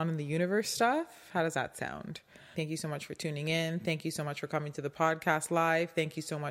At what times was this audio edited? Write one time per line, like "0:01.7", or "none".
0:02.5